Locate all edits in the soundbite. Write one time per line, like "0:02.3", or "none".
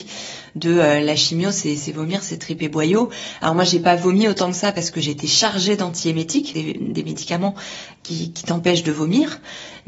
0:06.5